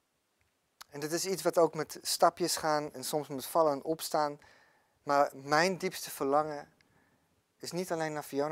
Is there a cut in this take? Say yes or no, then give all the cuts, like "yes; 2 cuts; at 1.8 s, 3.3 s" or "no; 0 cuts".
yes; 1 cut; at 5.0 s